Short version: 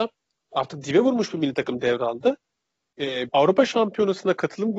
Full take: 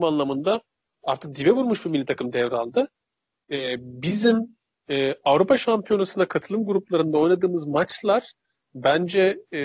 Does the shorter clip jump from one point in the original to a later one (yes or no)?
yes